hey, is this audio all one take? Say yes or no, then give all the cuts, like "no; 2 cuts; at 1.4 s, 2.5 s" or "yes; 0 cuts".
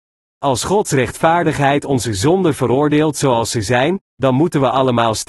yes; 0 cuts